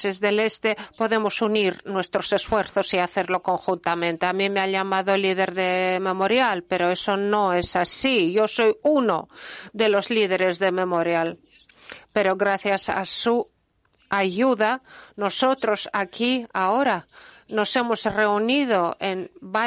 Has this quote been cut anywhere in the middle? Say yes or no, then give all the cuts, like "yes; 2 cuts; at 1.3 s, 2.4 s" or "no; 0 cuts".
no; 0 cuts